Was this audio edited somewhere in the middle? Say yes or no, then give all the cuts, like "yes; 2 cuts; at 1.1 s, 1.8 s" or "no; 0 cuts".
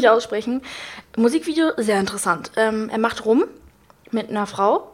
no; 0 cuts